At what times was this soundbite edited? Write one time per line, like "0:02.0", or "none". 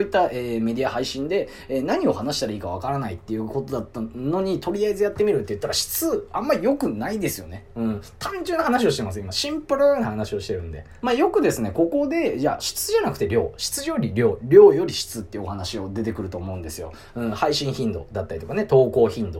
0:11.0